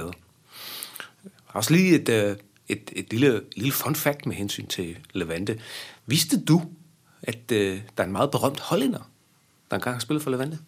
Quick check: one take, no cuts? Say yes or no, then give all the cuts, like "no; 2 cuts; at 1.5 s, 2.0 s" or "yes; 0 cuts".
yes; 0 cuts